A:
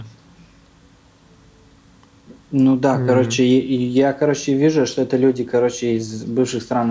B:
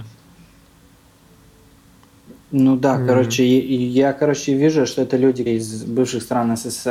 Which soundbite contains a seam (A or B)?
B